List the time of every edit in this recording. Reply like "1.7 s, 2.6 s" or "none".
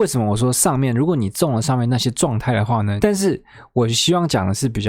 3.0 s